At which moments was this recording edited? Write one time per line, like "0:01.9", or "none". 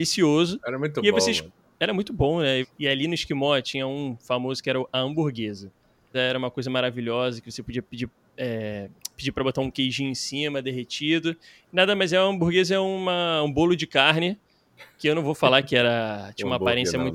0:02.6
0:06.1